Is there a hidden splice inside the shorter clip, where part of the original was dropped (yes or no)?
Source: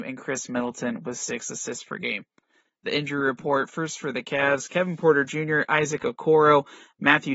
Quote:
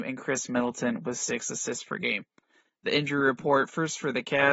no